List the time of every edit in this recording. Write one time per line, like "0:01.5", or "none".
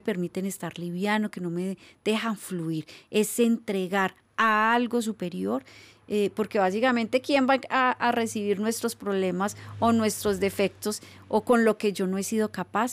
none